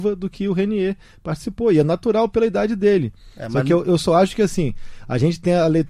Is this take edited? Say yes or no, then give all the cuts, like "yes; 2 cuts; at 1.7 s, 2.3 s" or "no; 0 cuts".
no; 0 cuts